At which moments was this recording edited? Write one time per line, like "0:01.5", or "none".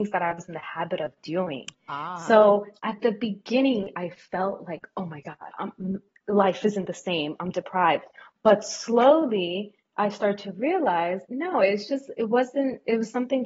0:05.5
0:11.2